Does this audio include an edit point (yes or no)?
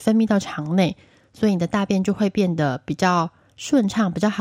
no